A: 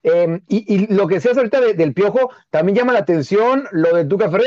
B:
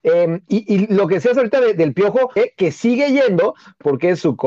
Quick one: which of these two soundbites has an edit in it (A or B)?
B